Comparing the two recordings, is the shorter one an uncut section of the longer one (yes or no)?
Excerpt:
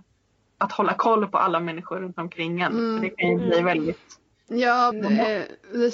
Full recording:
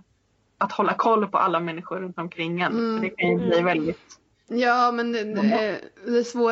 no